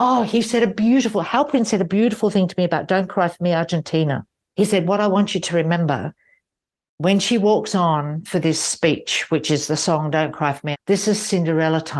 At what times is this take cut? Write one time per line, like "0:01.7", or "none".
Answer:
0:10.7